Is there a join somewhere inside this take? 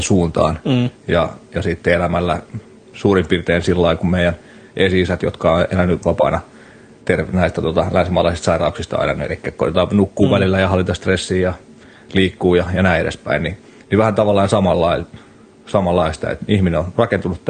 no; 0 cuts

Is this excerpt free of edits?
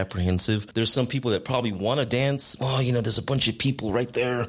no; 1 cut; at 2.6 s

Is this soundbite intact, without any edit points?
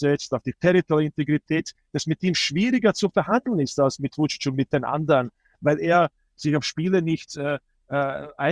yes; 0 cuts

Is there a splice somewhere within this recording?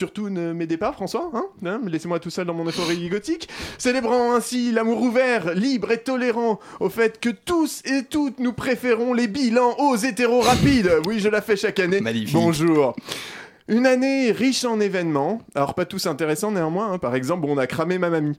no; 0 cuts

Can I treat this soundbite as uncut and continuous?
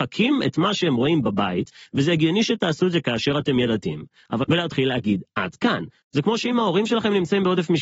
no; 2 cuts; at 4.4 s, 6.0 s

